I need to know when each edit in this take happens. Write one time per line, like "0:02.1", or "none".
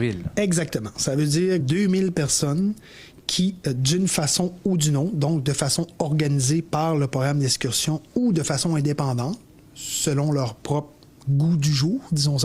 0:01.6